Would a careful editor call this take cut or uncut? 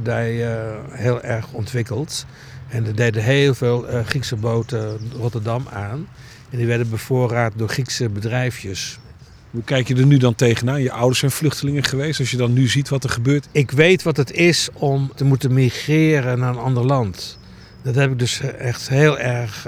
uncut